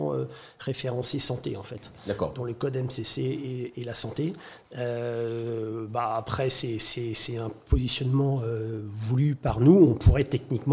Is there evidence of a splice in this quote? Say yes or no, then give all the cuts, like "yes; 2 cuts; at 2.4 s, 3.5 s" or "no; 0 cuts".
no; 0 cuts